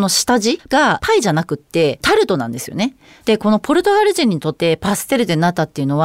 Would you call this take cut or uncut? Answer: cut